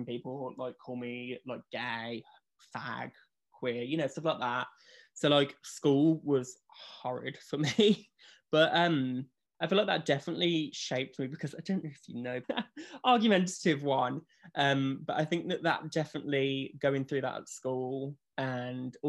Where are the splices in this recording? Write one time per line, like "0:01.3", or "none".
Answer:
0:12.4